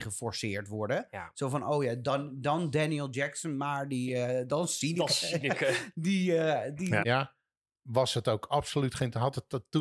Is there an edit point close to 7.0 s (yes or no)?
yes